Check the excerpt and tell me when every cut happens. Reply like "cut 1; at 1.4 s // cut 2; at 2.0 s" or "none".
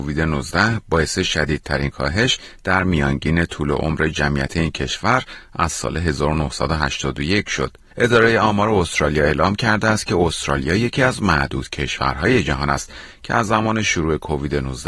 cut 1; at 7.9 s

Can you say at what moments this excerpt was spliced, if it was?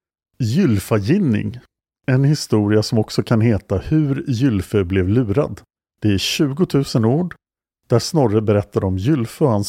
none

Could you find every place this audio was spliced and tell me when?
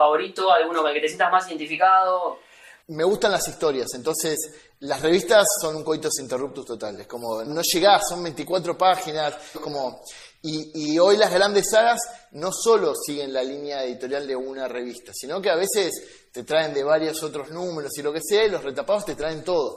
cut 1; at 2.8 s // cut 2; at 7.5 s // cut 3; at 9.5 s

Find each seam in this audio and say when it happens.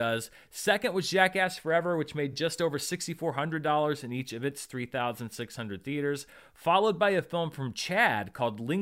none

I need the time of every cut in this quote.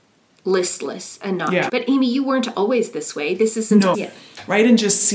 cut 1; at 1.7 s // cut 2; at 3.9 s

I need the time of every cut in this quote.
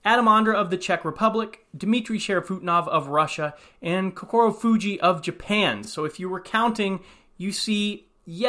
none

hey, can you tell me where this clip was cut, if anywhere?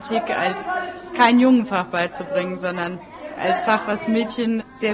none

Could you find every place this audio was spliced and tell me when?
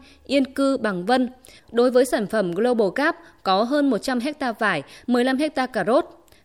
cut 1; at 1.6 s // cut 2; at 5.0 s

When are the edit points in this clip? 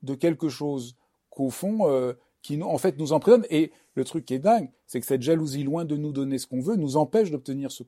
none

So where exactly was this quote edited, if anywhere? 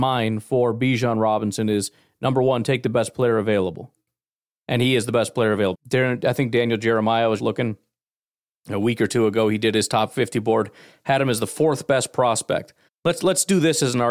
cut 1; at 5.7 s // cut 2; at 7.4 s // cut 3; at 12.9 s

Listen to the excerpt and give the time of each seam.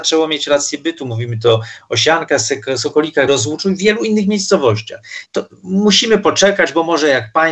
cut 1; at 3.3 s // cut 2; at 5.3 s

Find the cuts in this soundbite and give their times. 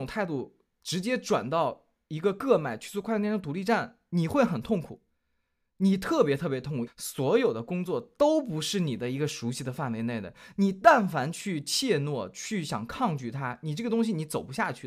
cut 1; at 6.9 s

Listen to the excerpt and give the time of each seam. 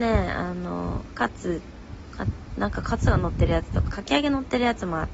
cut 1; at 3.8 s

